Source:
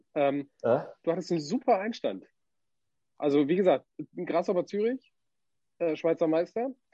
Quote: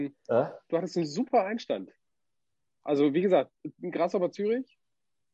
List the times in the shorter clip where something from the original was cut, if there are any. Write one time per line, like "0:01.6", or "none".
none